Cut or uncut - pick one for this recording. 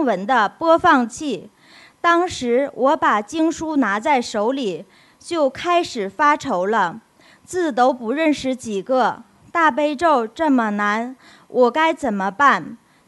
uncut